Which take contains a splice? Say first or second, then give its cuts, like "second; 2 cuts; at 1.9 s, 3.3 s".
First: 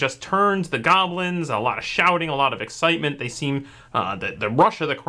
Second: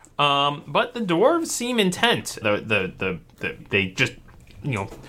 second; 2 cuts; at 2.4 s, 3.6 s